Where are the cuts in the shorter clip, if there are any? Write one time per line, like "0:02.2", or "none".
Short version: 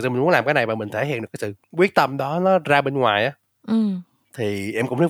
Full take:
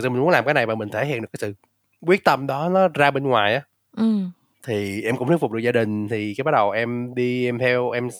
0:01.6